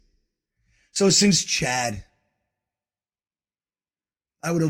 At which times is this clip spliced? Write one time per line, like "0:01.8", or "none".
none